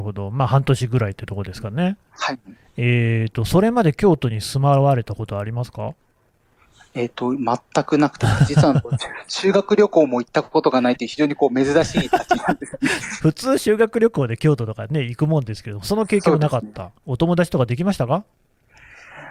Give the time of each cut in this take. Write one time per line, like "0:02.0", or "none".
0:17.0